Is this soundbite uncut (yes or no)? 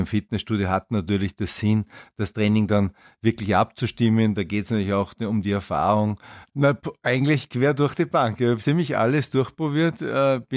no